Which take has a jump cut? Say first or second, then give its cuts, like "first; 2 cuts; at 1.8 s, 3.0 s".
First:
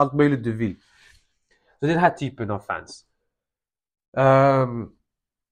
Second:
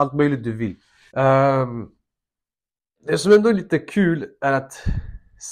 second; 1 cut; at 1.1 s